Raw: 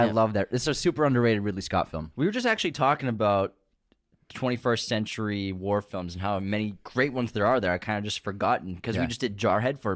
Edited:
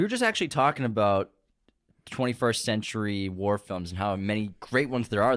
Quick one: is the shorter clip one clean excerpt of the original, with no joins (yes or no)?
yes